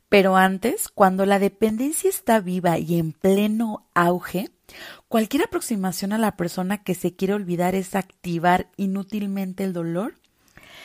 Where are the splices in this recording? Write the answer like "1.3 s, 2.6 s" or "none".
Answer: none